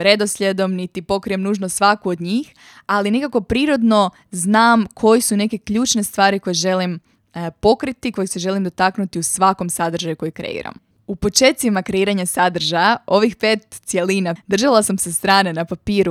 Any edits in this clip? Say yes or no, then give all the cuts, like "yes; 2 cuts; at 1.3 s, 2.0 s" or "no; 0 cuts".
yes; 2 cuts; at 10.9 s, 14.4 s